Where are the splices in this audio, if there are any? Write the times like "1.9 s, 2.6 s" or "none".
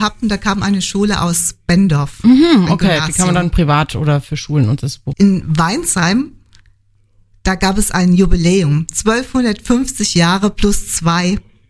5.1 s